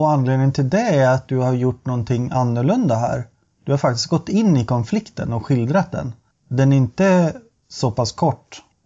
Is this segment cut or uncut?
uncut